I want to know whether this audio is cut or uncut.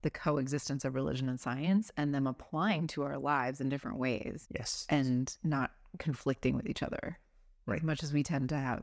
uncut